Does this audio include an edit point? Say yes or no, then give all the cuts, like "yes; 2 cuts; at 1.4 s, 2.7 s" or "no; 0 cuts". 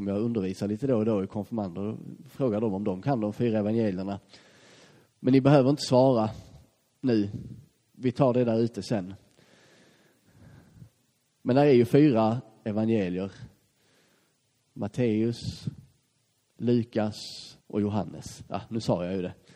yes; 2 cuts; at 16.4 s, 17.6 s